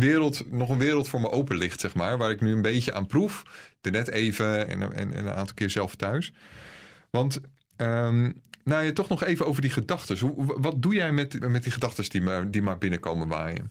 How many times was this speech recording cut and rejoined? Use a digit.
3